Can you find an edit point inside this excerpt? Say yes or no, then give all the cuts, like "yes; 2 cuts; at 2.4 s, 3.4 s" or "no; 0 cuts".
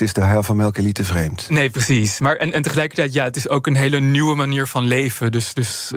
no; 0 cuts